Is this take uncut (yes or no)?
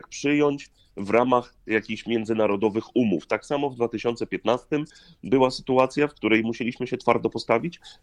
yes